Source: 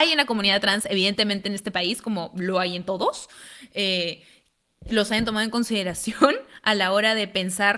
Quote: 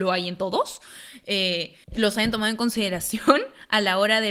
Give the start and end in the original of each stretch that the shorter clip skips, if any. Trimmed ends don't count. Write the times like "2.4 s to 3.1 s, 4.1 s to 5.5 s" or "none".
4.3 s to 4.8 s